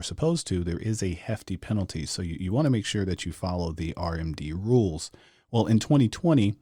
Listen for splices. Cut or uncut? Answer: uncut